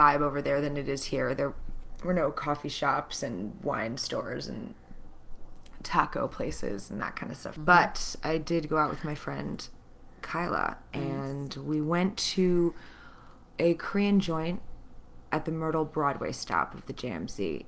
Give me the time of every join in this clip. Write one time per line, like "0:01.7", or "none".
0:07.6